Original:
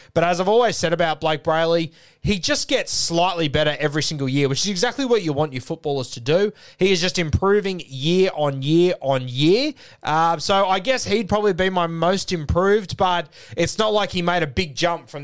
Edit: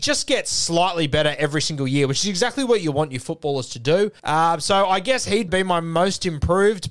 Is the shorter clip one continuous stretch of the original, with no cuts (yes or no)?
no